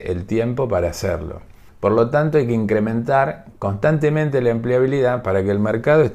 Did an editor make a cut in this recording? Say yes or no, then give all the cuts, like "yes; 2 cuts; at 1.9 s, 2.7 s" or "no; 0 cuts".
yes; 1 cut; at 1.7 s